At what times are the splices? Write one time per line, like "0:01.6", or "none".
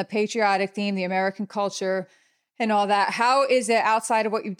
none